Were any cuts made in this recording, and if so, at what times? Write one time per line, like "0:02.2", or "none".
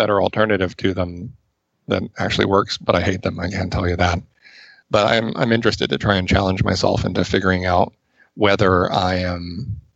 none